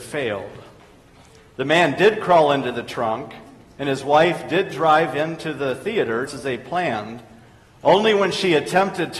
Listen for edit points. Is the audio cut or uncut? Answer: cut